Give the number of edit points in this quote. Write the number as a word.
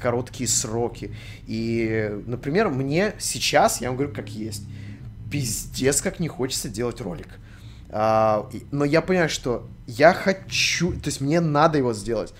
zero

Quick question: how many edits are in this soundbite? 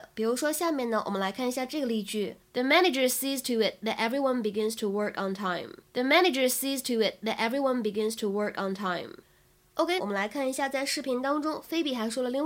three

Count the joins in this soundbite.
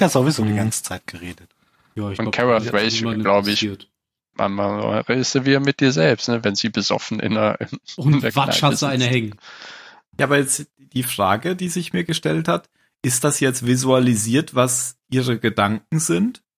one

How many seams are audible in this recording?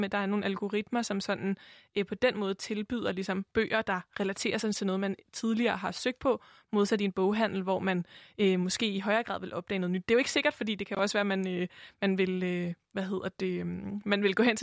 zero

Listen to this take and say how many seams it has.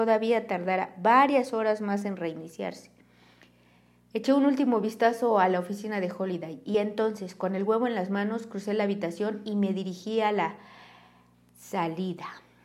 zero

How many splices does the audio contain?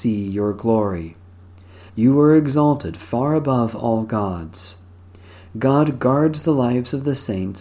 two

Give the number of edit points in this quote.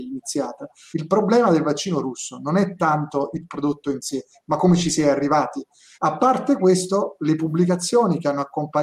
two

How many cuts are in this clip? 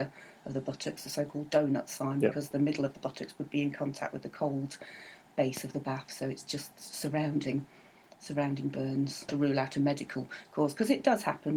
one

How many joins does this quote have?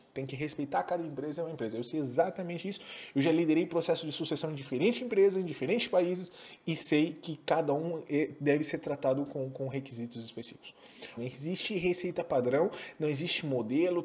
one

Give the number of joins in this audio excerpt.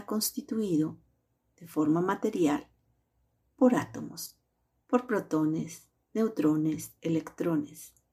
zero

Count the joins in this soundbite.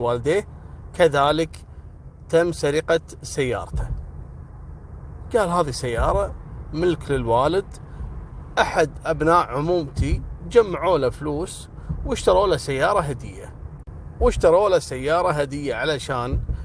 one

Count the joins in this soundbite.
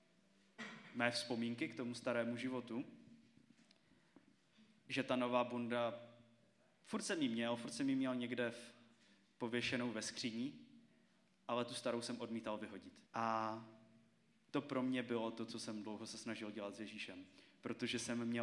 one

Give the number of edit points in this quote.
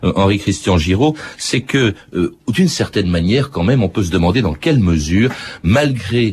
zero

